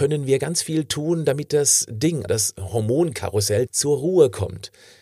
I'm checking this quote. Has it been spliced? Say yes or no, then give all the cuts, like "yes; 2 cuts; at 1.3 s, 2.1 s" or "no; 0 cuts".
yes; 2 cuts; at 2.3 s, 3.7 s